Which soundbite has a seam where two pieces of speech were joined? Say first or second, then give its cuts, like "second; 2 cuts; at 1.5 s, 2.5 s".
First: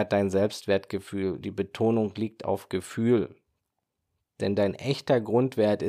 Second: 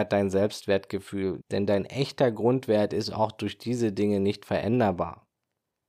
second; 1 cut; at 1.4 s